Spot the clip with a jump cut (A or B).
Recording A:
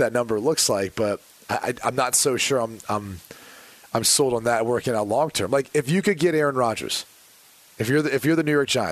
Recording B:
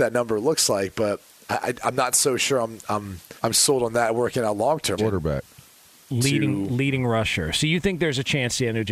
B